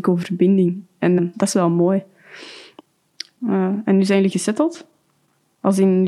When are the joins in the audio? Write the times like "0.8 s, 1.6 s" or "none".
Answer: 1.2 s, 3.4 s